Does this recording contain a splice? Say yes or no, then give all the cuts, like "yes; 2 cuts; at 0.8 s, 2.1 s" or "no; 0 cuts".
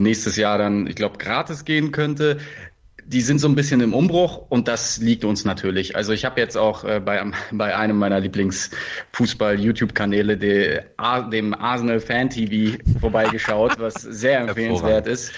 no; 0 cuts